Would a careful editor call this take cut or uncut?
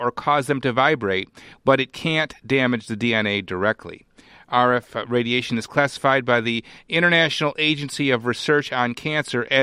cut